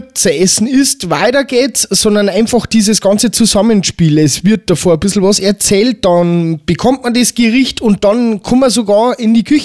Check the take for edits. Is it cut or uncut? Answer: uncut